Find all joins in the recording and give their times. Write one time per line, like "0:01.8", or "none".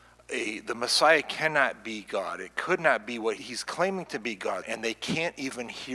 0:03.4
0:04.6